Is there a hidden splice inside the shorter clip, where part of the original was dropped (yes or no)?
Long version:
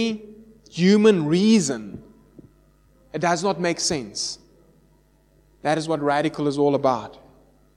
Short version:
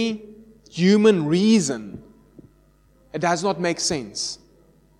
no